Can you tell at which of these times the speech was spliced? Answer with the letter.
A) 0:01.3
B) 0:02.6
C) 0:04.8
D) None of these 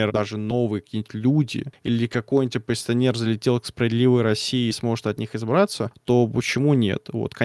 D